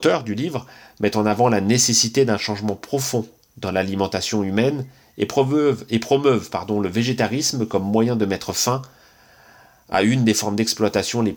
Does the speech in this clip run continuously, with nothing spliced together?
yes; 0 cuts

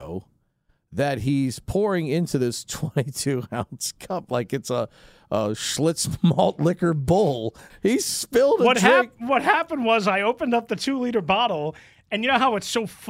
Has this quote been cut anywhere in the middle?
yes; 1 cut; at 7.7 s

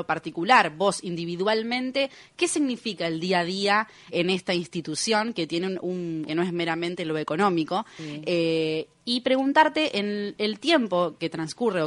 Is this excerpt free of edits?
no; 2 cuts; at 4.1 s, 6.3 s

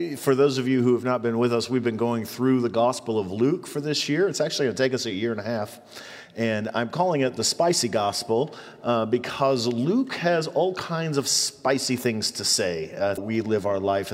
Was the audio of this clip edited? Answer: yes; 1 cut; at 13.2 s

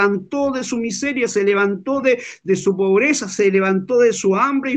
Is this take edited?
no; 0 cuts

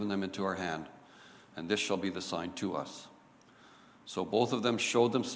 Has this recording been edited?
no; 0 cuts

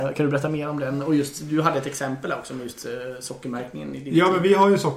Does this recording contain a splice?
no; 0 cuts

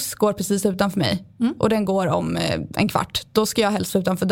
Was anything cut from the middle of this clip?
no; 0 cuts

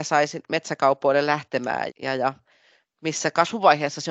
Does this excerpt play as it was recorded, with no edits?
no; 1 cut; at 1.9 s

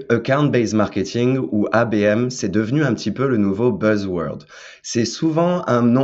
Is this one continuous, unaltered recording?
yes; 0 cuts

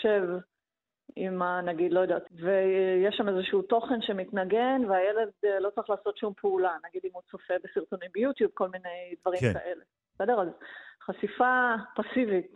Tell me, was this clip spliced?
yes; 1 cut; at 2.3 s

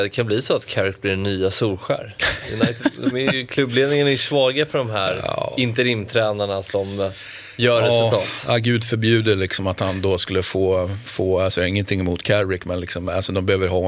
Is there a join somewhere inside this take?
no; 0 cuts

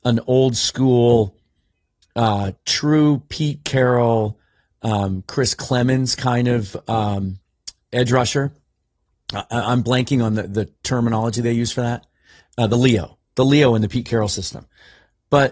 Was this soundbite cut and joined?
no; 0 cuts

